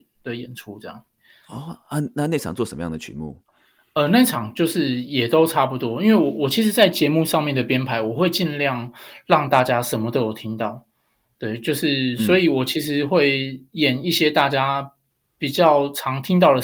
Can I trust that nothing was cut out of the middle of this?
yes; 0 cuts

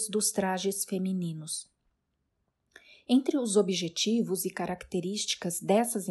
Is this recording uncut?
yes; 0 cuts

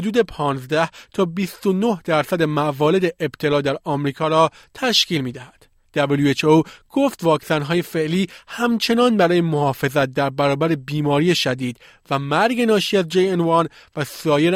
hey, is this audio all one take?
no; 1 cut; at 5.8 s

